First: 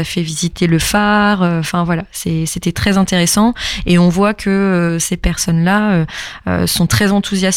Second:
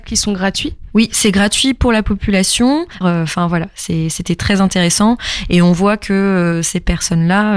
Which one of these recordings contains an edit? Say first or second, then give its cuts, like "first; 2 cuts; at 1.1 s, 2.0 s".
second; 1 cut; at 3.0 s